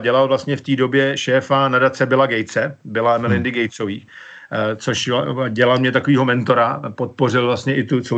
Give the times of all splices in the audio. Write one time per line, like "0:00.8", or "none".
none